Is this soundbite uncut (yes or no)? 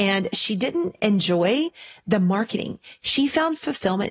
yes